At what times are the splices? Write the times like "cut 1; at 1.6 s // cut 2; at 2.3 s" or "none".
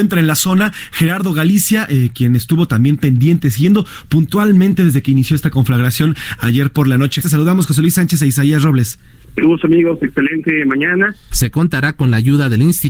cut 1; at 7.2 s // cut 2; at 11.3 s